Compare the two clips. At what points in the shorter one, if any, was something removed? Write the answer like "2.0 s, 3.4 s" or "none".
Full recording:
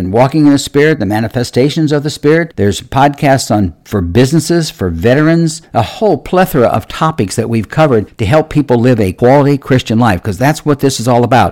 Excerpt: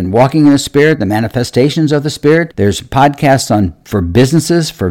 none